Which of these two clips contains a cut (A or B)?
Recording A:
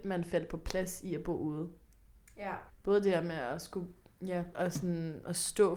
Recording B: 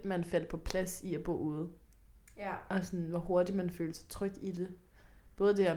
A